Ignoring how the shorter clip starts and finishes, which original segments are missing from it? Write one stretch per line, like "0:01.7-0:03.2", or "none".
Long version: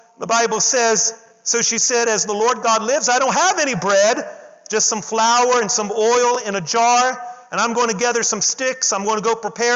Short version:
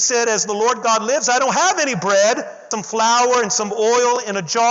0:04.5-0:04.9